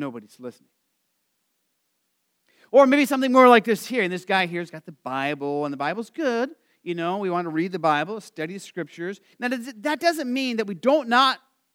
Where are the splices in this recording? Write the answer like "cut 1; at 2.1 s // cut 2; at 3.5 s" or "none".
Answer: cut 1; at 9.3 s